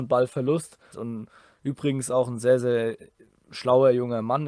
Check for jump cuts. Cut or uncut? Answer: cut